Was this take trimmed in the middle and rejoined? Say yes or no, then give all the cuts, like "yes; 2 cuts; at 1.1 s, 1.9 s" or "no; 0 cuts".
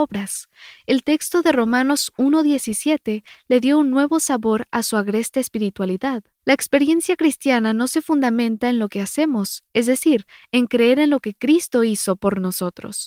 yes; 2 cuts; at 6.4 s, 9.7 s